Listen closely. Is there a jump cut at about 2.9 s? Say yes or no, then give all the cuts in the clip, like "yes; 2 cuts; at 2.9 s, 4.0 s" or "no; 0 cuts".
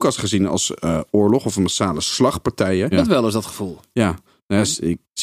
yes; 1 cut; at 2.9 s